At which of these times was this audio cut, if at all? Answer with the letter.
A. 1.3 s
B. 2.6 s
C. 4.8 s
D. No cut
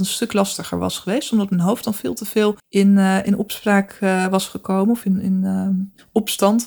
B